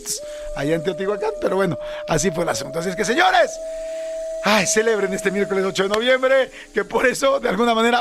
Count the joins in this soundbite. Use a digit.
0